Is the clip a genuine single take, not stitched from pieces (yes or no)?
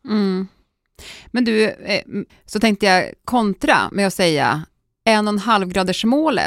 no